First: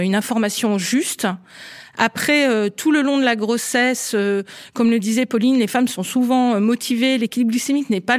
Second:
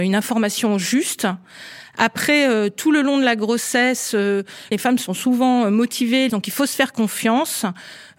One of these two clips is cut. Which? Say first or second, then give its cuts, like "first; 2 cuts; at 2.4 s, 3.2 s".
second; 2 cuts; at 4.7 s, 6.3 s